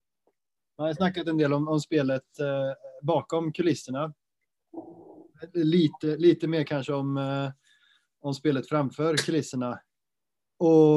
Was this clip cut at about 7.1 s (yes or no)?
no